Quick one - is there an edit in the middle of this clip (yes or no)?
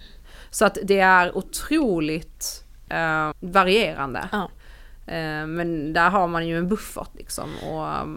yes